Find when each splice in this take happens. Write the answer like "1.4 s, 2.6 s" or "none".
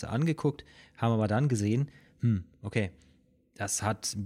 none